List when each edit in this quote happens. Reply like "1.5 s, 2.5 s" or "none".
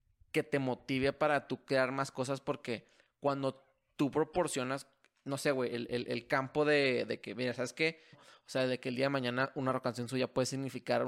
8.1 s

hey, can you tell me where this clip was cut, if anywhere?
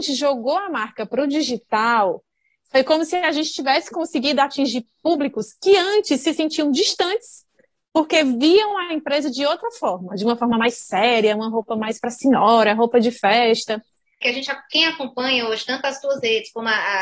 14.2 s

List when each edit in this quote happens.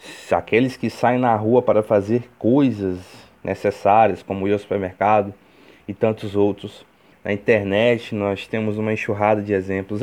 7.1 s

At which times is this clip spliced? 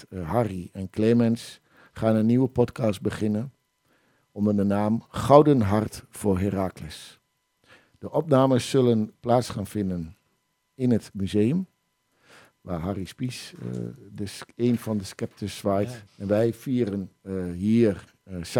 16.1 s

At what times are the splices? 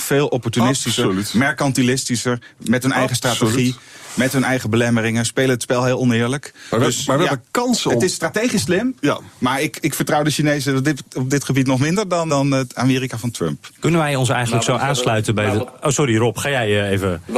12.3 s

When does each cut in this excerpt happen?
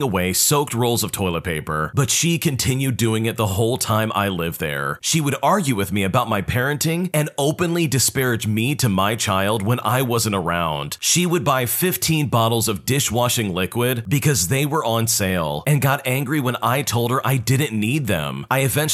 5.0 s

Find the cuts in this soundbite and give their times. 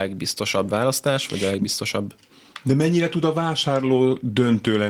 none

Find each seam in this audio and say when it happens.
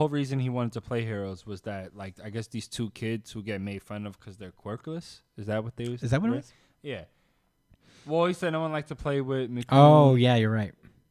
none

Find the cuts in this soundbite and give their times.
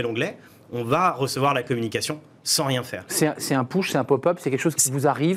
none

